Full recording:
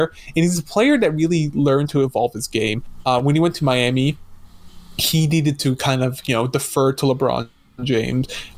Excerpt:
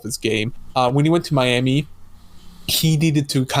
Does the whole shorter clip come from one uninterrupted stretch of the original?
yes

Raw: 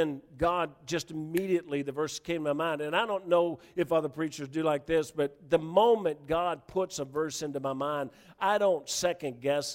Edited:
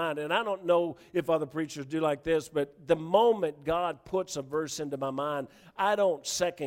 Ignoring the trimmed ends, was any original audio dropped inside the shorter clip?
no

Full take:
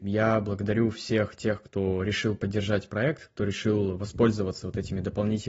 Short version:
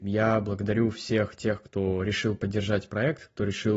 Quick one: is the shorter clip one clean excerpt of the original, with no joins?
yes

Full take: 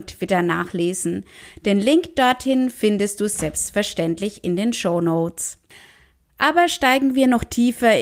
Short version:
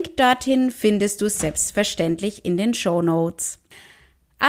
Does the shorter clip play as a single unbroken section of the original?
yes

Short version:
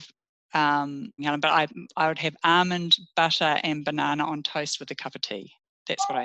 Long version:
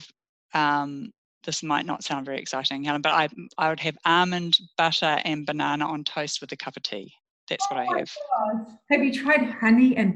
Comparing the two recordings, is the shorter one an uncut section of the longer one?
no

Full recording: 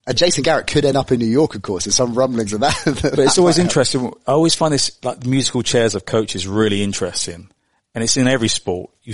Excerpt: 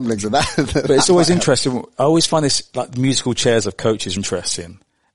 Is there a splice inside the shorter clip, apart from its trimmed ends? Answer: yes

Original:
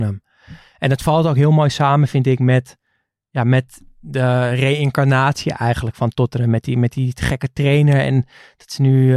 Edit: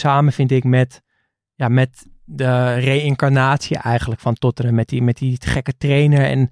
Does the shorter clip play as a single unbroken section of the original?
yes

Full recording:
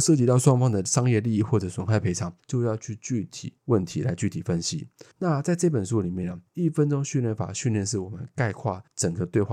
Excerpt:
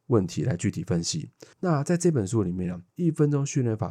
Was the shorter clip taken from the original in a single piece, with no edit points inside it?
yes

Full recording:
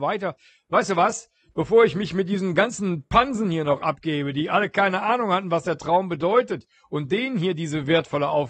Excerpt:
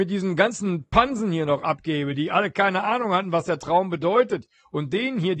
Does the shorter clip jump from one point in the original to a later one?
no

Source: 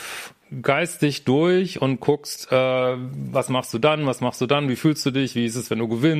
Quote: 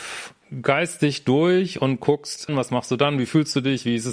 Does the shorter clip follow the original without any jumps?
no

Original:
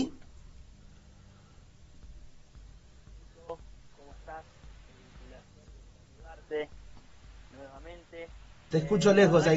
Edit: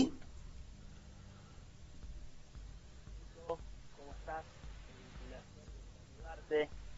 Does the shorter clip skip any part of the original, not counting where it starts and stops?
no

